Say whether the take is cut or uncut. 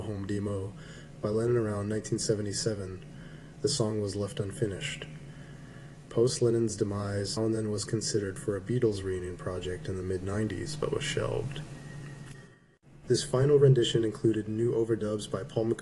cut